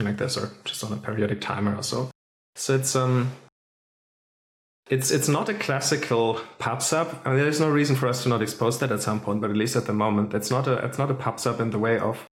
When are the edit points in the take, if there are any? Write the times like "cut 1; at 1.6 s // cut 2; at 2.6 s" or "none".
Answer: none